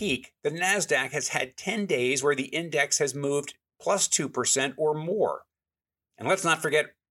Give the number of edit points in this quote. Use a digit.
1